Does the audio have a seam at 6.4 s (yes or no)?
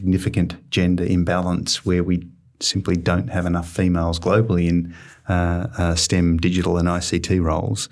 no